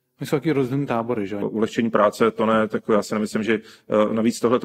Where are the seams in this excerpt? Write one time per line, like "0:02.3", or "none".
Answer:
0:01.4